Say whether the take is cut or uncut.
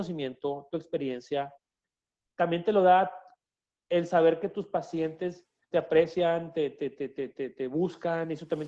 cut